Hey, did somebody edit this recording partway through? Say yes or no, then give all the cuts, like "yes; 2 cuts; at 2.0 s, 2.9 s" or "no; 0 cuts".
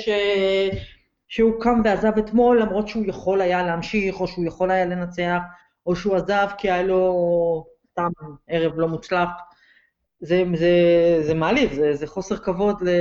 no; 0 cuts